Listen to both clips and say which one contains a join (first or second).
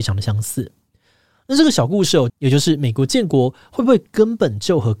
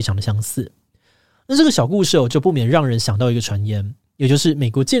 first